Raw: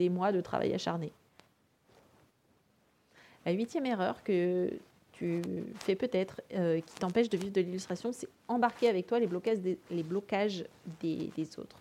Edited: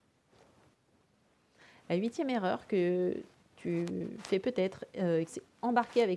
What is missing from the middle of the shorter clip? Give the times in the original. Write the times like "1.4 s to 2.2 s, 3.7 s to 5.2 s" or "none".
6.8 s to 8.1 s